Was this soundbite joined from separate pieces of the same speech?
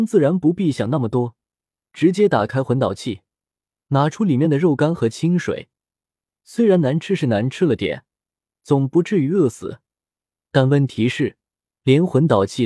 yes; 1 cut; at 11.6 s

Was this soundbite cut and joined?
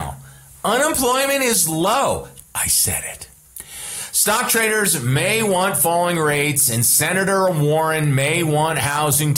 yes; 1 cut; at 2.4 s

